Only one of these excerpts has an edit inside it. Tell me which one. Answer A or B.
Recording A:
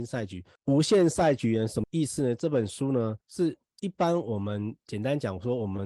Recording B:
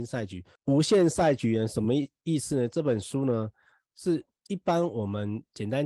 A